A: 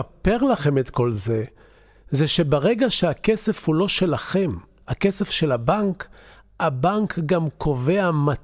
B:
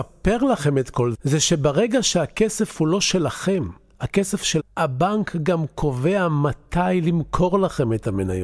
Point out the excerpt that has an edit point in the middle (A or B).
B